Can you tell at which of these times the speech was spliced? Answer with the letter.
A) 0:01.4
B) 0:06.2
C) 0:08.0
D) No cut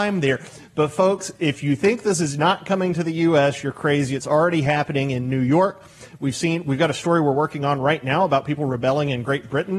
D